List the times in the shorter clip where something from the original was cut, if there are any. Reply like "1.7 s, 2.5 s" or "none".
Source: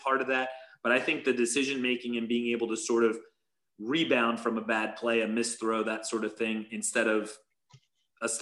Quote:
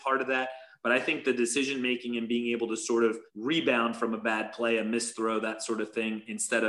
3.3 s